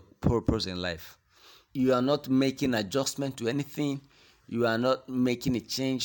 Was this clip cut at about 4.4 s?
no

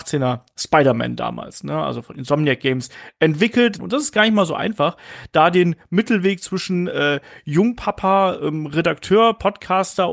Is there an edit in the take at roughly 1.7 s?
no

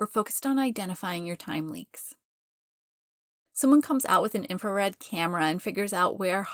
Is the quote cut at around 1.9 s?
no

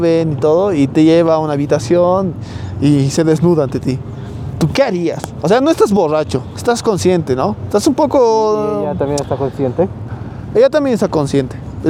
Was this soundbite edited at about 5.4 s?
no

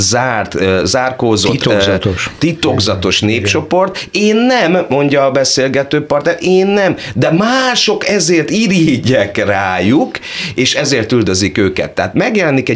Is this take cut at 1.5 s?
no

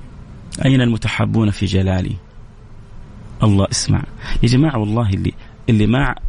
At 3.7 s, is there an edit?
yes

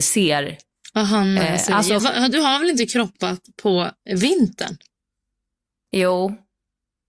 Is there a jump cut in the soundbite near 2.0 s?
yes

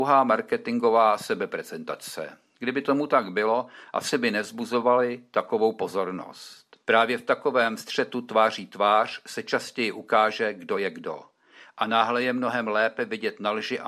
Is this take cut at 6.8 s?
yes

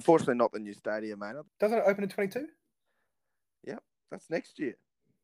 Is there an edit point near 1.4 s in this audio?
yes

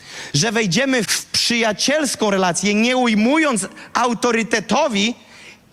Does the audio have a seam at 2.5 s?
no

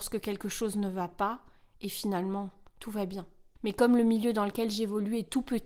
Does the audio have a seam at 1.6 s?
no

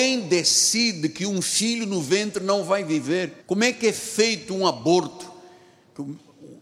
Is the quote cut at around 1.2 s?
no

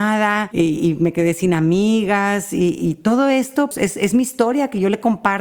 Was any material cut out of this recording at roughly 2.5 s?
no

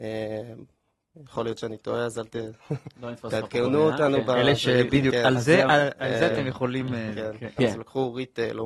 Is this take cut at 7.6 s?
yes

